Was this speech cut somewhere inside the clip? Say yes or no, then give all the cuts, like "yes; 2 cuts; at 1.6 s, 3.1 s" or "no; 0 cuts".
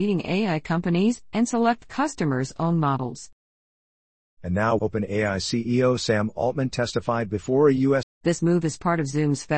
yes; 2 cuts; at 4.8 s, 8.0 s